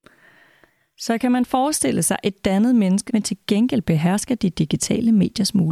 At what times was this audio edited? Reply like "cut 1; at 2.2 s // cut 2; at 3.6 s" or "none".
cut 1; at 3.1 s